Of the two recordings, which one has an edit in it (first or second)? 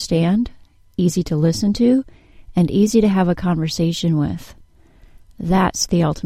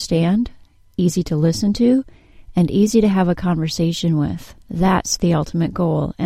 second